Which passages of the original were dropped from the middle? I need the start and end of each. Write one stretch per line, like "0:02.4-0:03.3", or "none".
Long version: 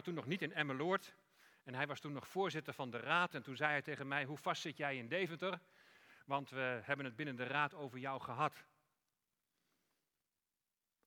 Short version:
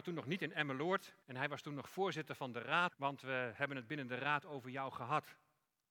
0:01.2-0:01.6
0:03.3-0:06.2